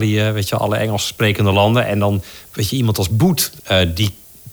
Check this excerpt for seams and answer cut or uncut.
cut